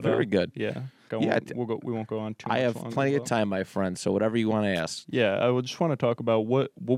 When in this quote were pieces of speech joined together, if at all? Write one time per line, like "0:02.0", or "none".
0:01.1